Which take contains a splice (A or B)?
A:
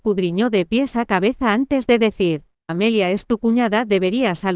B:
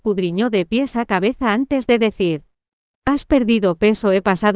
A